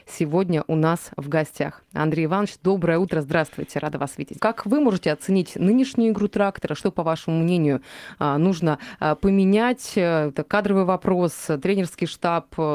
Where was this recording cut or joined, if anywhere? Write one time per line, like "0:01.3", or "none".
0:04.4